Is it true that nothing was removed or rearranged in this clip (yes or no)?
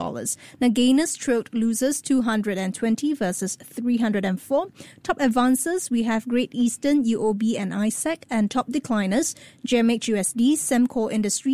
yes